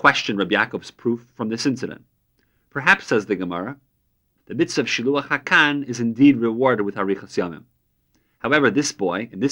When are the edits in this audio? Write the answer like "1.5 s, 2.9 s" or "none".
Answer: 4.4 s